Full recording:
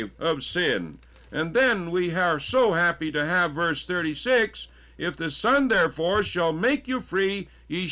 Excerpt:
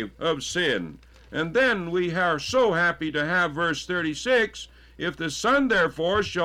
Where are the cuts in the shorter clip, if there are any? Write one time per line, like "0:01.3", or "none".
none